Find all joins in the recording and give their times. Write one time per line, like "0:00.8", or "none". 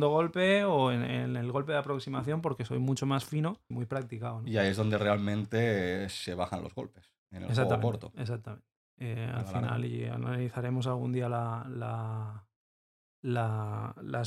0:03.7